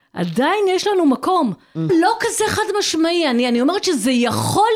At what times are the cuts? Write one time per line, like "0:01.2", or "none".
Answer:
0:01.9

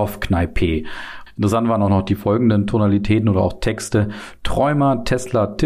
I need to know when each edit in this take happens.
0:01.3

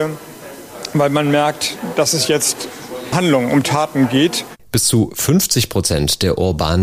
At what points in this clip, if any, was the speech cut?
0:03.1
0:04.6

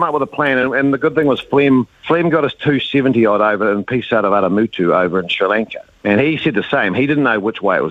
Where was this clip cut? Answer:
0:01.9

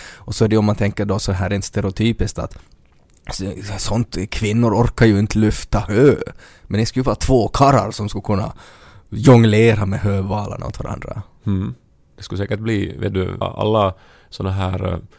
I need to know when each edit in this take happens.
0:12.0
0:13.4

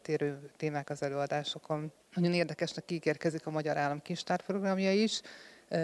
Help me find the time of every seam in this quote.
0:02.0

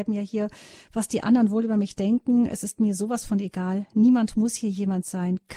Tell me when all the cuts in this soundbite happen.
none

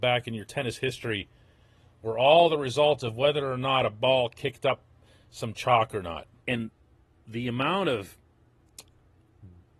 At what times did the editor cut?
0:06.4

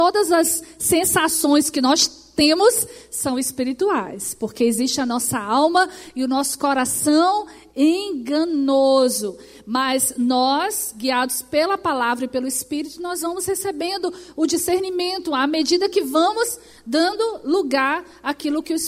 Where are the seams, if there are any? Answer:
none

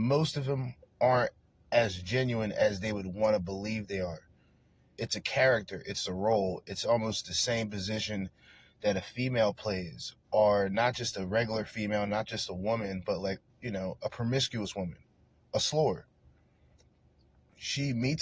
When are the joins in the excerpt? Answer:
none

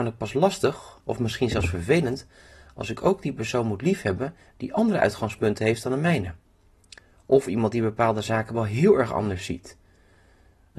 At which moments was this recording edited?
none

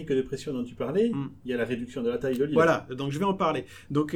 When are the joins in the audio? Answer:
none

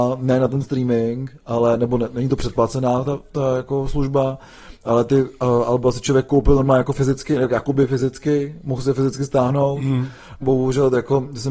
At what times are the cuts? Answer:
0:10.4

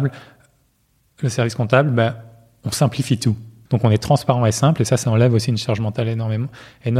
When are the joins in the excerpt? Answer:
0:03.7

